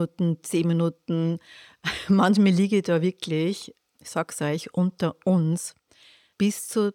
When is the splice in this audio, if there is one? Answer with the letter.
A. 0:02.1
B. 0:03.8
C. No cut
C